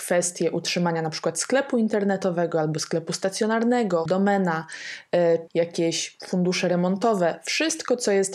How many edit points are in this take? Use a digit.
2